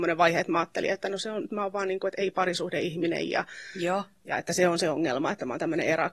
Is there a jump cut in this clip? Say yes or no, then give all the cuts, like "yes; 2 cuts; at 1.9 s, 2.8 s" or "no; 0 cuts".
no; 0 cuts